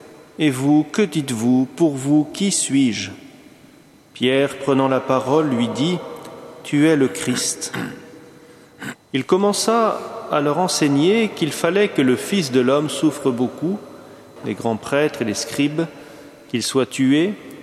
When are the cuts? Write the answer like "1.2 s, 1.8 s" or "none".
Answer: 8.9 s, 14.4 s